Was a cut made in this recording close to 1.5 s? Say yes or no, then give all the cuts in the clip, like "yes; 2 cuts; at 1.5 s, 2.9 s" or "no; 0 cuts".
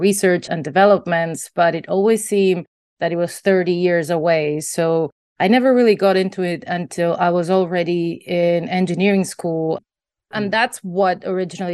no; 1 cut; at 9.8 s